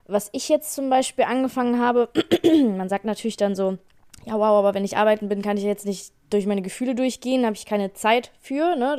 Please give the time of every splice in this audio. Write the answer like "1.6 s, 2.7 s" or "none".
none